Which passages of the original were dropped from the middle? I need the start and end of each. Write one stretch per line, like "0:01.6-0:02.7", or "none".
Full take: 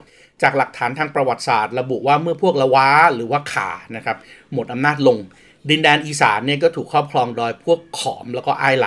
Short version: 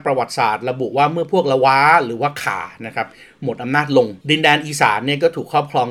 0:05.3-0:05.6